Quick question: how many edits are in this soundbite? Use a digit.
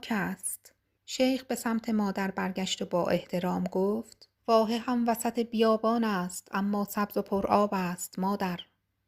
2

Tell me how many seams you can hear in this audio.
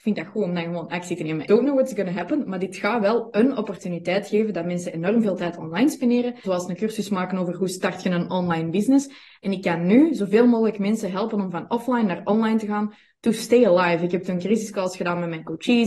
2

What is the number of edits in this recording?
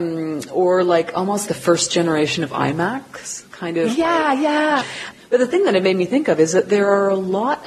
2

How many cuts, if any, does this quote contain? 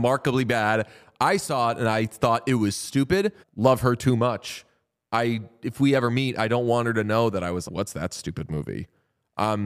2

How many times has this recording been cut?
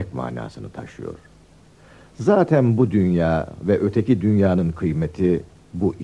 0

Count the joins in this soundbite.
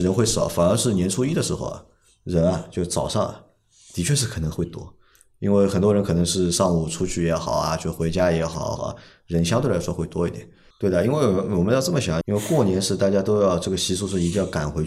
3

